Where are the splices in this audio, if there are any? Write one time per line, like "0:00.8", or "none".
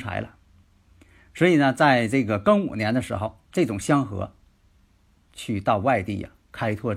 none